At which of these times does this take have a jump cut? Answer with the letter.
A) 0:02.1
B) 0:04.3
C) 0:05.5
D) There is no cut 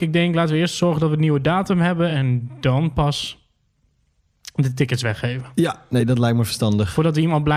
D